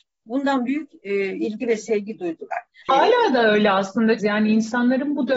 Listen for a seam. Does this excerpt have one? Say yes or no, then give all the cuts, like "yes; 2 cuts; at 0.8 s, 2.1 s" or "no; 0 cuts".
yes; 2 cuts; at 2.8 s, 4.2 s